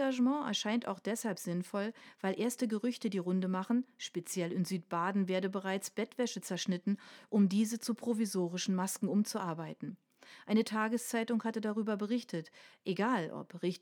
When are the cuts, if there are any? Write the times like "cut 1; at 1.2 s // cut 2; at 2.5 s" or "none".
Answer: none